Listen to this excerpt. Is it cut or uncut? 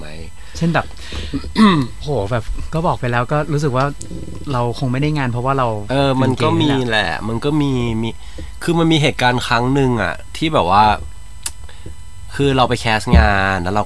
uncut